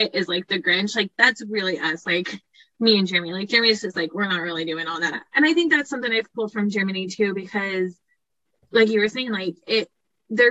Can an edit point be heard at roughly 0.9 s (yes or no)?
no